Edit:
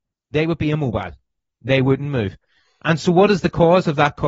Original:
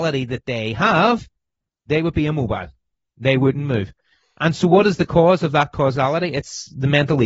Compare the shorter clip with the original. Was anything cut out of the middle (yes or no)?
no